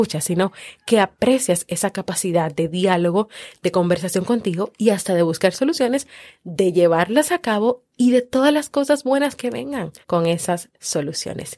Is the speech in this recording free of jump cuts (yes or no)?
no